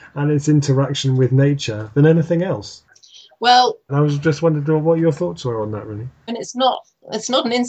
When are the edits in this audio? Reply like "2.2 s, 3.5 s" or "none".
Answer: 3.9 s, 6.3 s